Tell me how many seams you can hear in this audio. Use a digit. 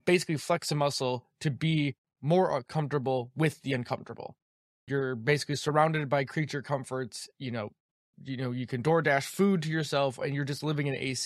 2